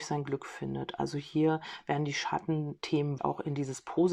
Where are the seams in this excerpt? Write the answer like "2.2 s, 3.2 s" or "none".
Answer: 3.2 s